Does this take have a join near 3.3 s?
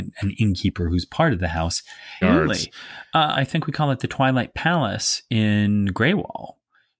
yes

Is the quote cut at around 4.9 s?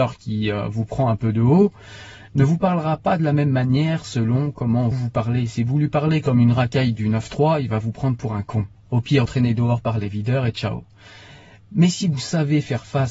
yes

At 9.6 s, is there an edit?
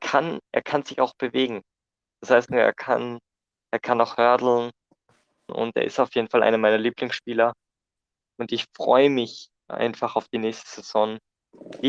no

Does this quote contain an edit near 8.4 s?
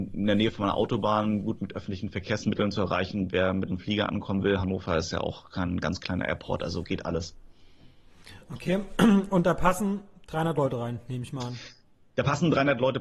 no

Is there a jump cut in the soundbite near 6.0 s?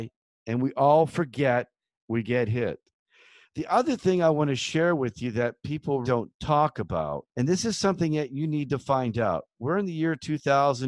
yes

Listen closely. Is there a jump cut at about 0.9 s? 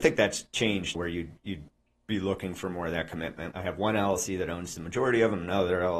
yes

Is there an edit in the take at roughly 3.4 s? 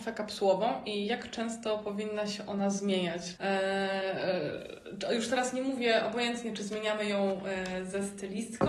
yes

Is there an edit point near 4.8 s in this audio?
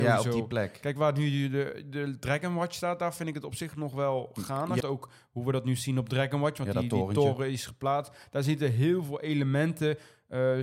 yes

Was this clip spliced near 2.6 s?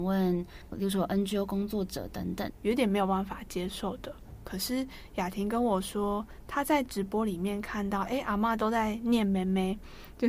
yes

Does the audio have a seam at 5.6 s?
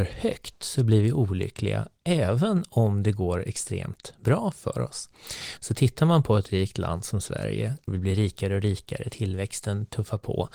yes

